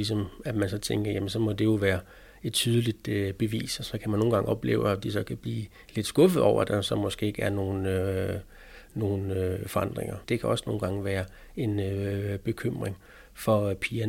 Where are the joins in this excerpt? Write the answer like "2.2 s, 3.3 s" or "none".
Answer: 10.2 s